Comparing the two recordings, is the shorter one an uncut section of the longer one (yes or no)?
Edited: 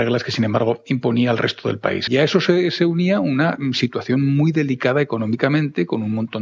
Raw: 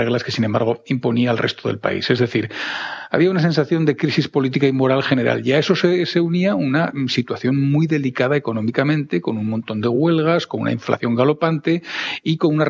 no